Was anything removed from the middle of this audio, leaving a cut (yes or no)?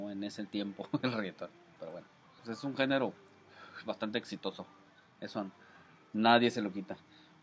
yes